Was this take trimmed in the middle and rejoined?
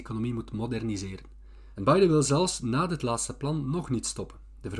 yes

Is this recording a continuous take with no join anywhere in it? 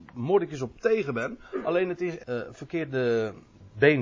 no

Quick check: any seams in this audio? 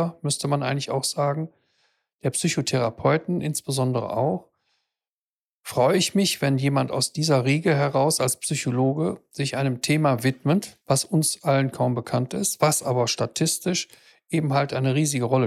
yes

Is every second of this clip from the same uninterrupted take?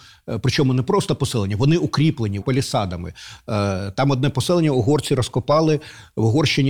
no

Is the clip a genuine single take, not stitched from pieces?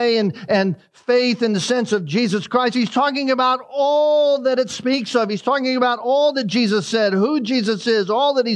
yes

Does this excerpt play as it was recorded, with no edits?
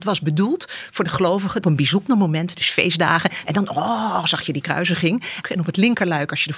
no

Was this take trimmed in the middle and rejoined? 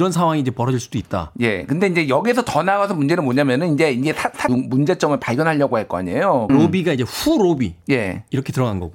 yes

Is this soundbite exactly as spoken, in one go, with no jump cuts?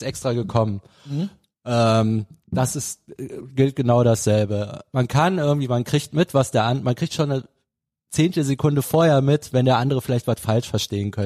yes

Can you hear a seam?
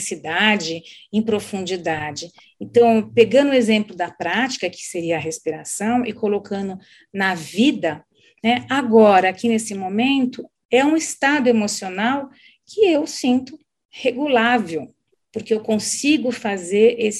no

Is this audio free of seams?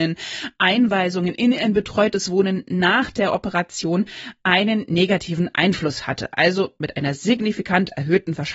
yes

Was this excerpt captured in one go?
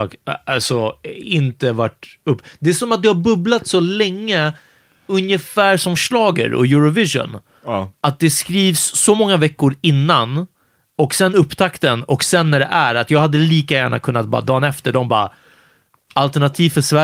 yes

